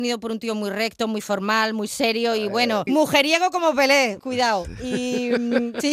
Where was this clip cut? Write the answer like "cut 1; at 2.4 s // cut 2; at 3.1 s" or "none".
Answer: cut 1; at 2.9 s // cut 2; at 4.2 s

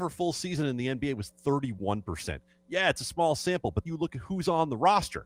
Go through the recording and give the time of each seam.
cut 1; at 3.9 s

